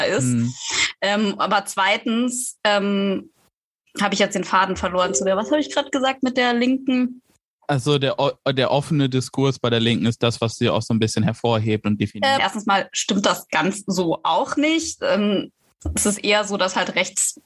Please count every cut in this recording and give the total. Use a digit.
1